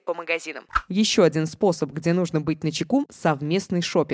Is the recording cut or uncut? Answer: uncut